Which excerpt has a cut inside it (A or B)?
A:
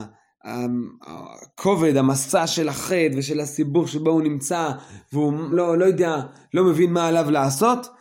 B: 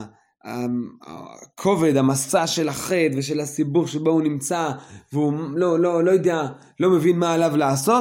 A